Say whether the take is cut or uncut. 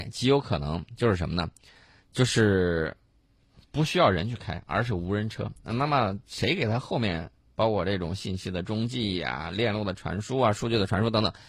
uncut